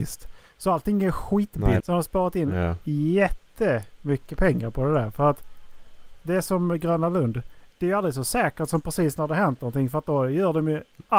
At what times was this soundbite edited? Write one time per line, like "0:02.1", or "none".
0:01.8